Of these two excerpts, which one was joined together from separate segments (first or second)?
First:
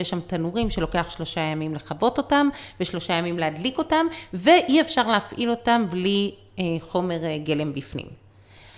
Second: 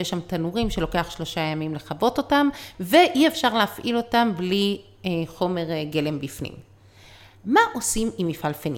second